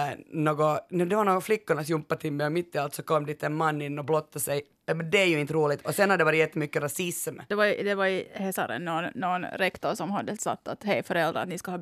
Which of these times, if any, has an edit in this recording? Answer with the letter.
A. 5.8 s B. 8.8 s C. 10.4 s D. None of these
C